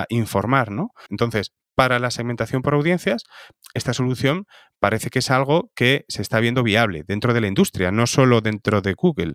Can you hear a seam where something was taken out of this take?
yes; 1 cut; at 1.1 s

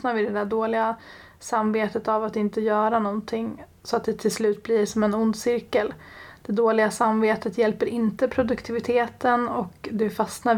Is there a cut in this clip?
no; 0 cuts

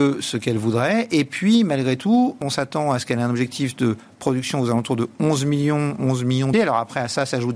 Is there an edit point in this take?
yes; 2 cuts; at 2.4 s, 6.5 s

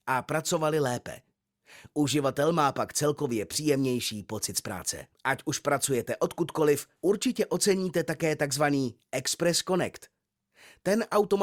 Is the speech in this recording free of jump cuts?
no; 2 cuts; at 5.1 s, 7.0 s

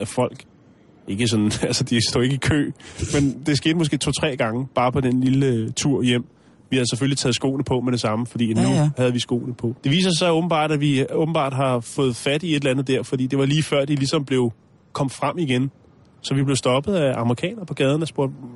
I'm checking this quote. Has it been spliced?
yes; 1 cut; at 9.8 s

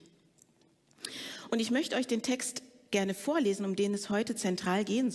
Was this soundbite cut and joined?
no; 0 cuts

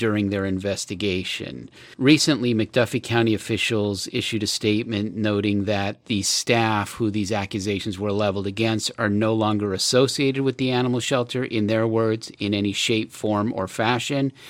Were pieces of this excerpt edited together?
no; 0 cuts

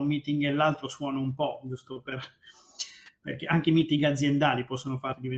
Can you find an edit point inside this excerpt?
no; 0 cuts

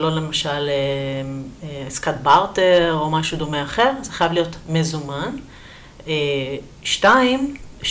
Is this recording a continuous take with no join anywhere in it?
yes; 0 cuts

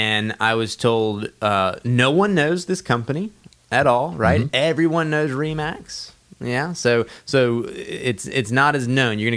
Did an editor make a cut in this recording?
no; 0 cuts

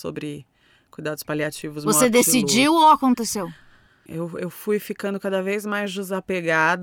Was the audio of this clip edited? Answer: yes; 1 cut; at 4.1 s

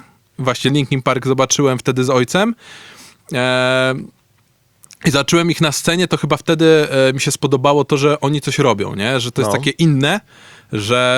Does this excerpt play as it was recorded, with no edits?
yes; 0 cuts

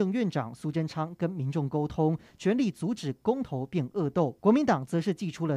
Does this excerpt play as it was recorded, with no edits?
no; 1 cut; at 4.4 s

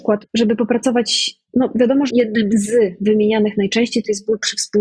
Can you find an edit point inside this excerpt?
yes; 1 cut; at 2.1 s

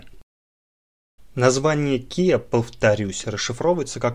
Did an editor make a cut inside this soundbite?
yes; 1 cut; at 1.2 s

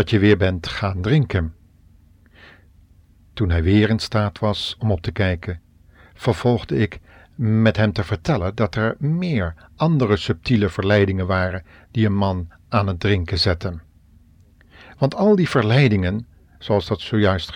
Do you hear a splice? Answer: no; 0 cuts

